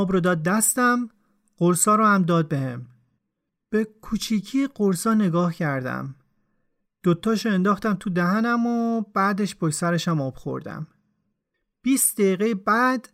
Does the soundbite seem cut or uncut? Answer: cut